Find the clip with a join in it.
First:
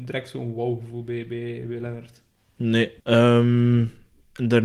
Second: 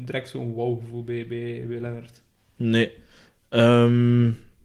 first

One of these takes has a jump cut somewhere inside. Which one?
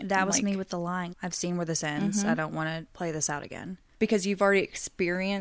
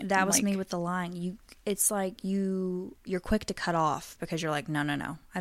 first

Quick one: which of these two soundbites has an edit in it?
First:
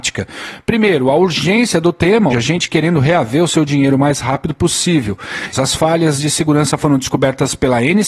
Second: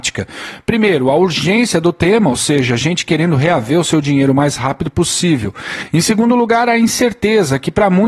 first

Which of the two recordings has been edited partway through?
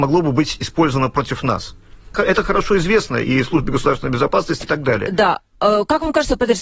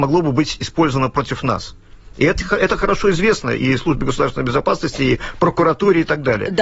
first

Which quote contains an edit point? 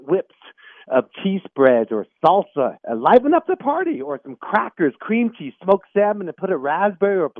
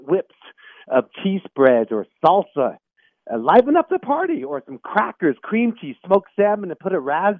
first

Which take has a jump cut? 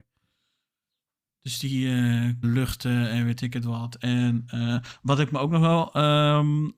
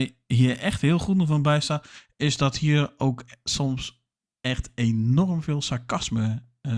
first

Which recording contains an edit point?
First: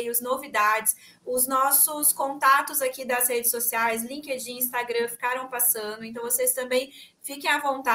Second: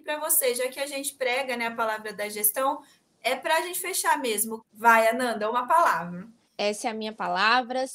second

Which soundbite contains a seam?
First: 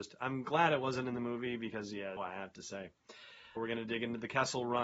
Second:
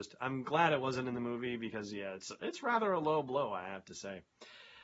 first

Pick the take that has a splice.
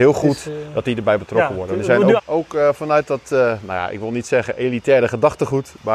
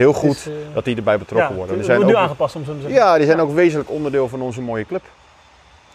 first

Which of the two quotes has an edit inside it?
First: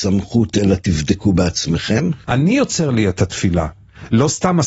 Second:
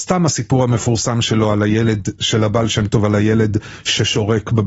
first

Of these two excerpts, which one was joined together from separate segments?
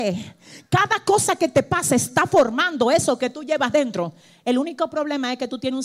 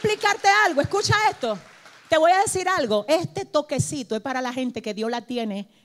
second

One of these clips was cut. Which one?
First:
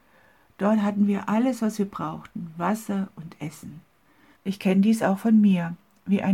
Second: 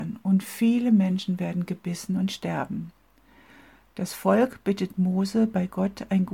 first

